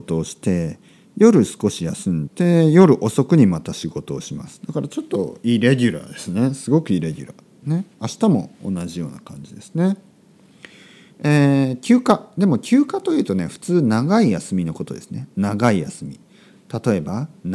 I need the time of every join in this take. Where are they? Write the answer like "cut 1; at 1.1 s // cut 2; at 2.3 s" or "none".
cut 1; at 2.3 s

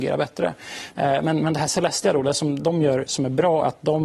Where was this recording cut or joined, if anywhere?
cut 1; at 0.9 s

